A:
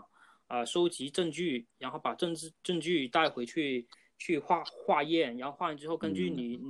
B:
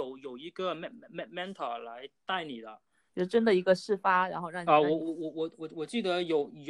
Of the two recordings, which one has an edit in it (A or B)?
B